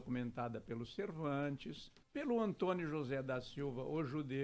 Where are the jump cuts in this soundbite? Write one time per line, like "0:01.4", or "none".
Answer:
0:02.0

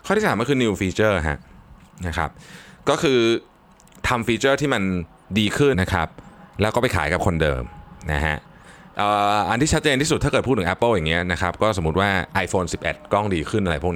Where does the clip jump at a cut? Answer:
0:05.7

